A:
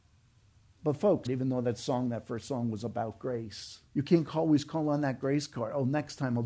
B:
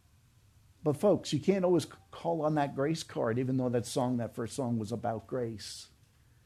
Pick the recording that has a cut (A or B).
A